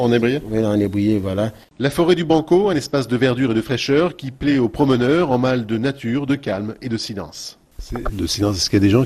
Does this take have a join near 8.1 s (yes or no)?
yes